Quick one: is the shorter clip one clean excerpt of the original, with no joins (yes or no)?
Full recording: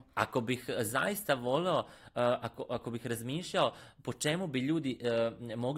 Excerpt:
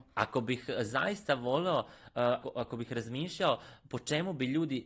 no